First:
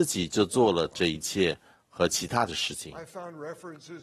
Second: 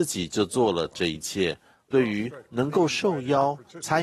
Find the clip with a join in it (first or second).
second